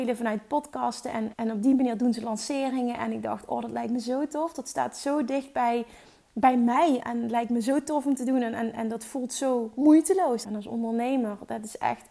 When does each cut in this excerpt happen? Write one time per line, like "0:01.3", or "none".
0:01.3
0:07.0
0:10.4